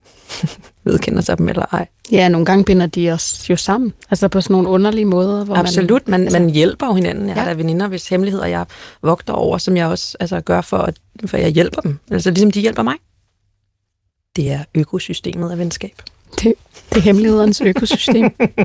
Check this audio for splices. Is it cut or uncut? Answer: uncut